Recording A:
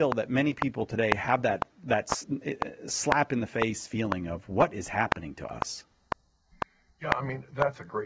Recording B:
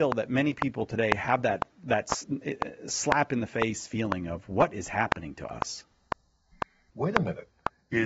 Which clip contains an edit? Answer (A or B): B